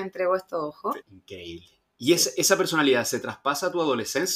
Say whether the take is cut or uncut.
cut